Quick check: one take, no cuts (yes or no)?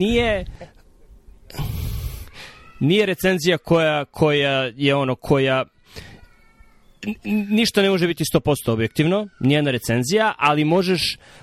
yes